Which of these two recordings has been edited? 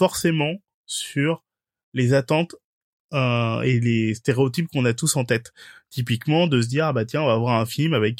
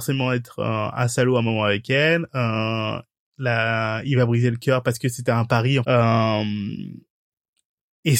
second; 1 cut; at 5.8 s

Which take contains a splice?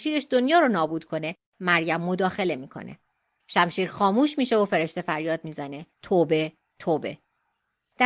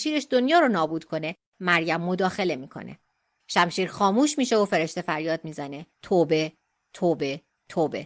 first; 1 cut; at 6.7 s

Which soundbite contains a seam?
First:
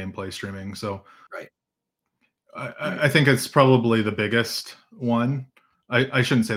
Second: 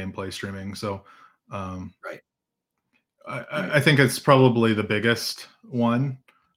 first; 1 cut; at 1.3 s

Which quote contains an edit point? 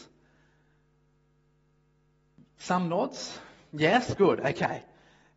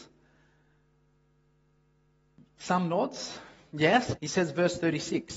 second; 1 cut; at 4.2 s

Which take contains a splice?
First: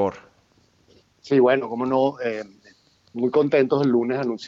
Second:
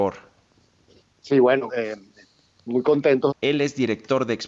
second; 2 cuts; at 1.7 s, 3.3 s

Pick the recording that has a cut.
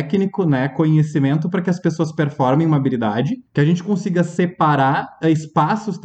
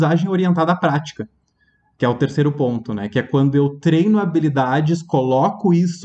first; 1 cut; at 3.5 s

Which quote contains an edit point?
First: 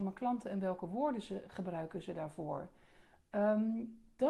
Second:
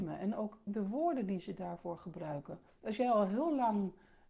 second; 1 cut; at 2.7 s

